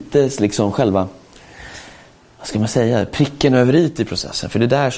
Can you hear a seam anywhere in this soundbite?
no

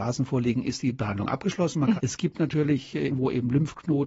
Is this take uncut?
no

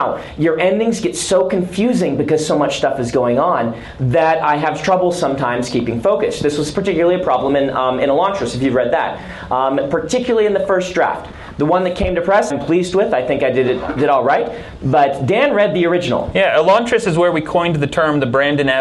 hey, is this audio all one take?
no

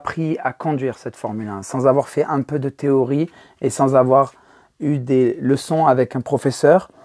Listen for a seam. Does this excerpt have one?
no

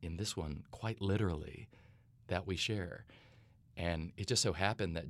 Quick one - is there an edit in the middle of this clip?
no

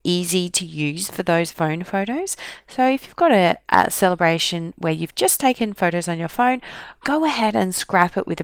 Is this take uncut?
yes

